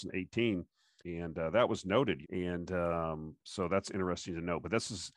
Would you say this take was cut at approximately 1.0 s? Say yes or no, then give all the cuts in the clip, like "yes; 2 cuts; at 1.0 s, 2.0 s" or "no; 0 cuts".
yes; 2 cuts; at 1.0 s, 2.2 s